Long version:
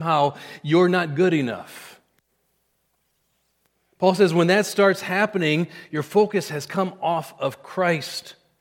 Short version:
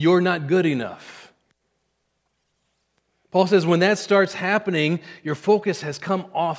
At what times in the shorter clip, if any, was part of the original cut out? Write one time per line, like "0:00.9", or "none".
none